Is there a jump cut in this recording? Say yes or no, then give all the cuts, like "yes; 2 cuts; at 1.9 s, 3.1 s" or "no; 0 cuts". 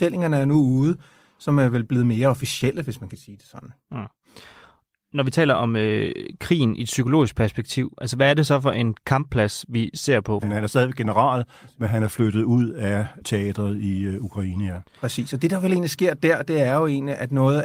yes; 1 cut; at 10.4 s